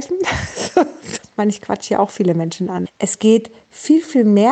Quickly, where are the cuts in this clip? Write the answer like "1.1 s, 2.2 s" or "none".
1.2 s, 2.9 s

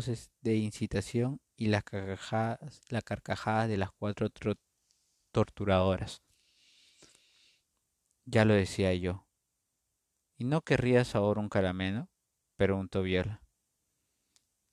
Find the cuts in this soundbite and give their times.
none

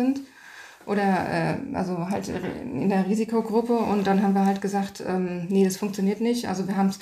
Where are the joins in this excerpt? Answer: none

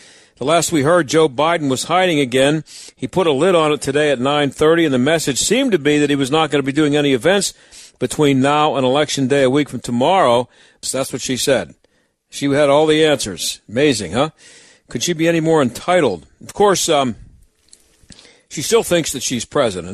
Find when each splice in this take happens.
10.8 s

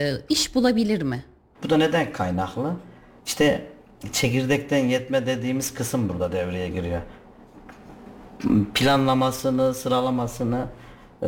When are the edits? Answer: 1.5 s

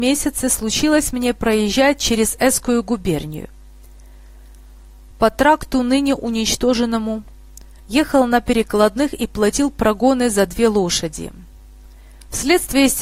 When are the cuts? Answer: 7.8 s

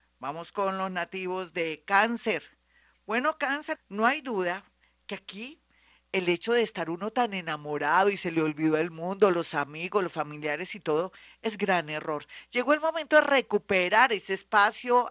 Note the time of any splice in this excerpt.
3.7 s

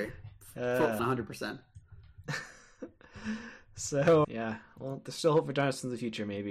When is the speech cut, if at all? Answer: 1.0 s, 4.2 s

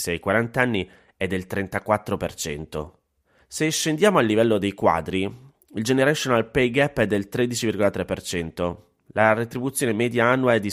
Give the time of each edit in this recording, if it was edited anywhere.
3.4 s

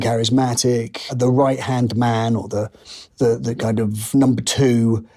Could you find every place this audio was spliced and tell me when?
none

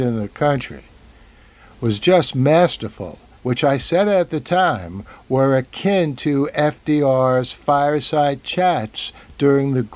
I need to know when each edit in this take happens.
3.4 s

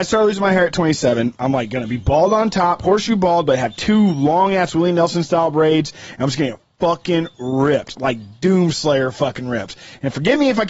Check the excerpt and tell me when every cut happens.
1.3 s

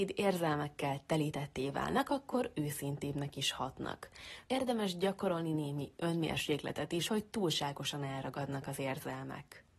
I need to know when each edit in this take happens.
4.4 s, 7.1 s

